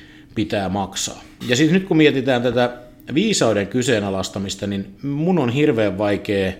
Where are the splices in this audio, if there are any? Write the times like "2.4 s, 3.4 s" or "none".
1.4 s

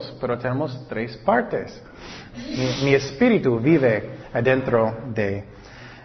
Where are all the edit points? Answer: 2.3 s

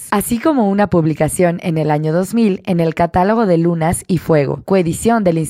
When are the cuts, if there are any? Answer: none

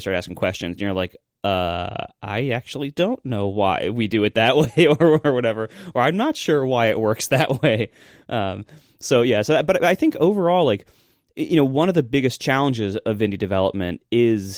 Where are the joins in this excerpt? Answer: none

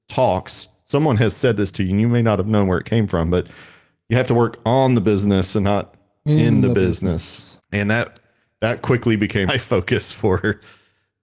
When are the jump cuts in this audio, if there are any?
7.6 s, 9.5 s

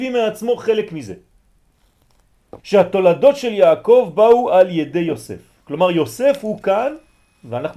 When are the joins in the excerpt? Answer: 2.6 s

